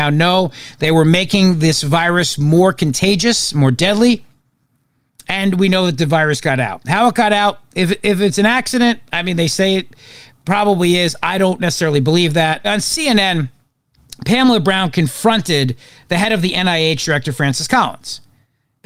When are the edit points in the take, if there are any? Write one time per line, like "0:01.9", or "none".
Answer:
0:12.6